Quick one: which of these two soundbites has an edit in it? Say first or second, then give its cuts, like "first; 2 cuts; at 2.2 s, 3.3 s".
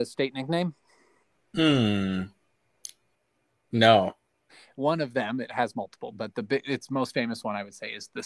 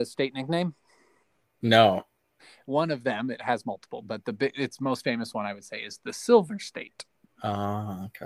second; 1 cut; at 1.4 s